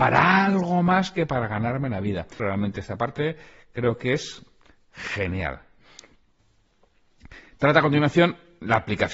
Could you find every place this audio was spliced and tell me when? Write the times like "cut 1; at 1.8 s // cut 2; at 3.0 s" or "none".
cut 1; at 2.4 s

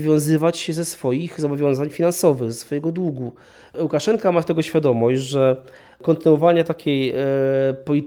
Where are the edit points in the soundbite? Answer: none

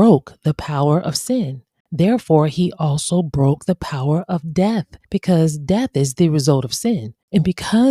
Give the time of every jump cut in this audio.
cut 1; at 5.0 s

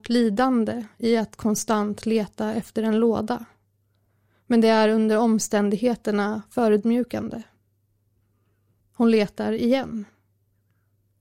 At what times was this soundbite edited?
cut 1; at 8.8 s

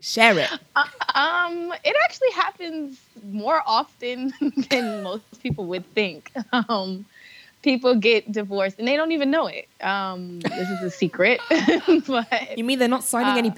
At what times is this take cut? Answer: none

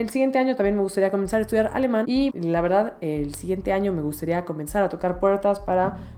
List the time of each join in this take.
cut 1; at 2.3 s

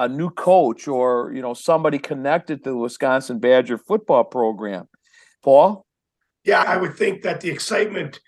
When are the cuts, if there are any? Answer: cut 1; at 5.4 s // cut 2; at 6.6 s

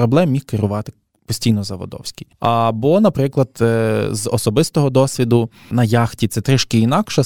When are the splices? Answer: none

